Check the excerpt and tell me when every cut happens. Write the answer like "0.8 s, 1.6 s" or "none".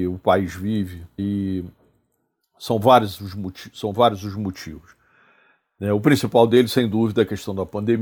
1.2 s